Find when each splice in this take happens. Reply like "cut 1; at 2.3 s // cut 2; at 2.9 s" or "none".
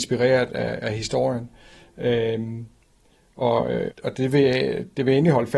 cut 1; at 3.9 s